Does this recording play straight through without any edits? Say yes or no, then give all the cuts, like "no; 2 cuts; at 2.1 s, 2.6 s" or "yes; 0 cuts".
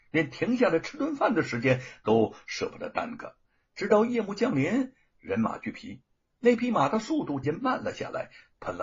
no; 1 cut; at 7.4 s